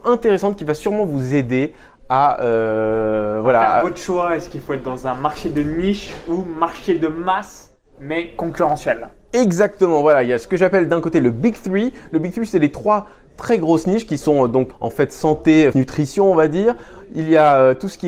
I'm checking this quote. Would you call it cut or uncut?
cut